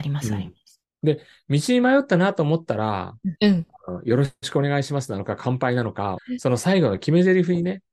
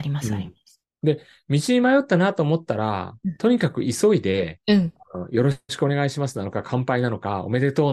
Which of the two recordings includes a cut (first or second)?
first